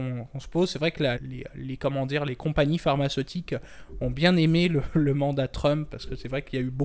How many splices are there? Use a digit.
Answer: 1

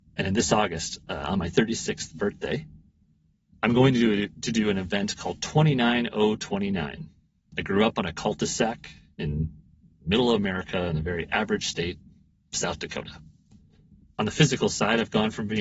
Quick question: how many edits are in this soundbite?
2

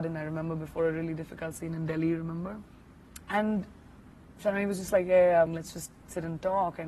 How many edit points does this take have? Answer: 2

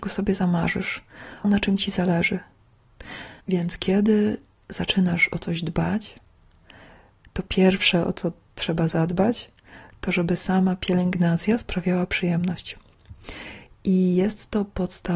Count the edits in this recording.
2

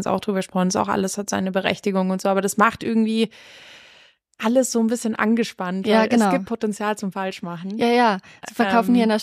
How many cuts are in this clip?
0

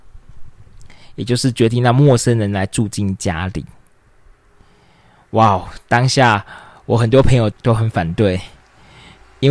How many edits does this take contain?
1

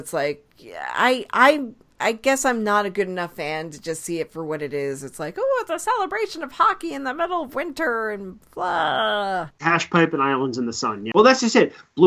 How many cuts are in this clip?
2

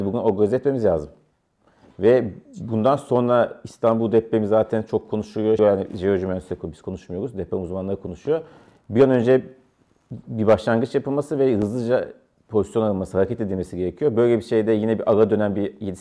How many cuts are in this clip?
1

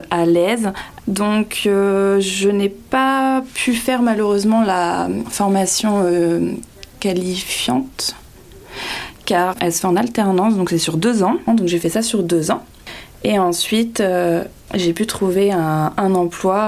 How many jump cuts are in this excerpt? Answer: 3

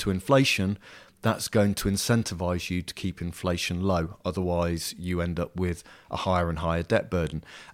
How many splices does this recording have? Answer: 0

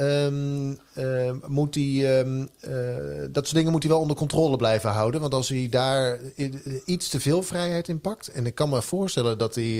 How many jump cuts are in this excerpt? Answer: 0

